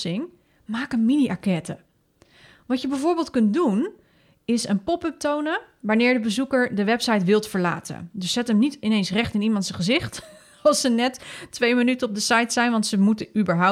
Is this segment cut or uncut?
uncut